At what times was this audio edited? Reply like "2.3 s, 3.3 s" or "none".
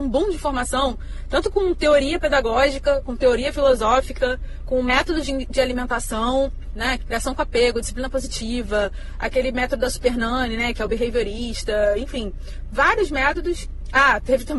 7.0 s